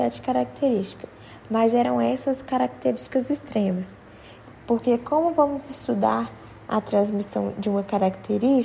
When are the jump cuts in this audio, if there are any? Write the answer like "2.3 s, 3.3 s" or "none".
4.4 s